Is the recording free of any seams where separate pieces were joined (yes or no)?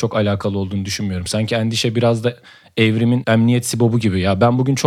yes